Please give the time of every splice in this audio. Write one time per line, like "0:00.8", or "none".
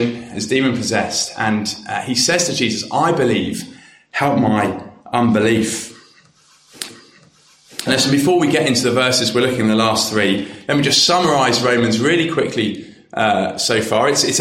none